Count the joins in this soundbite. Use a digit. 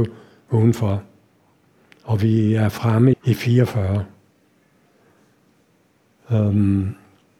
1